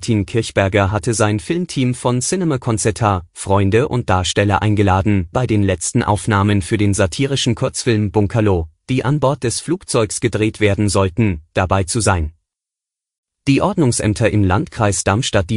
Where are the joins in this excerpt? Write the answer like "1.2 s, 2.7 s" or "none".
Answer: 5.3 s, 13.3 s